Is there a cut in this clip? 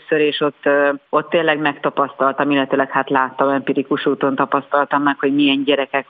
yes; 1 cut; at 1.1 s

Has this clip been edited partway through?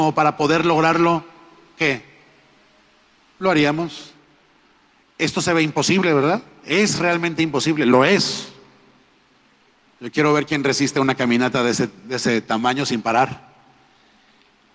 no; 0 cuts

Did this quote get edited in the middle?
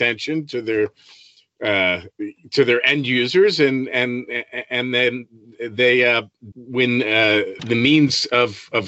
yes; 2 cuts; at 6.5 s, 7.6 s

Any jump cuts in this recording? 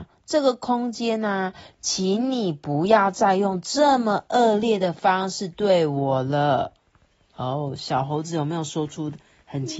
no; 0 cuts

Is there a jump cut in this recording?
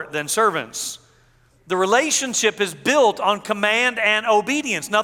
yes; 1 cut; at 1.5 s

